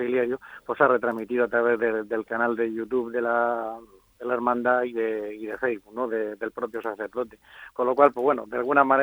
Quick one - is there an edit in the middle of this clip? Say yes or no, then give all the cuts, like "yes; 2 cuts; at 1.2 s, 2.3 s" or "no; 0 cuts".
no; 0 cuts